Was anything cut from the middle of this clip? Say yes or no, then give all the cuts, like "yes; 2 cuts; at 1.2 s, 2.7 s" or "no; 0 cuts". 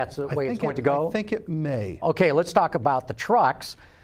yes; 1 cut; at 2.0 s